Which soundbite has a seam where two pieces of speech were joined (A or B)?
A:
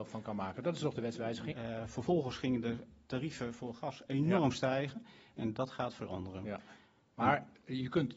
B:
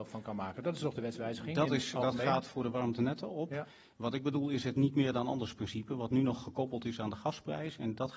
A